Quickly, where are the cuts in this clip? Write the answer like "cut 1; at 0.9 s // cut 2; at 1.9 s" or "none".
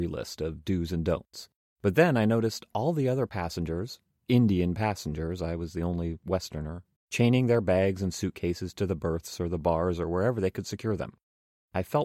cut 1; at 1.8 s // cut 2; at 7.0 s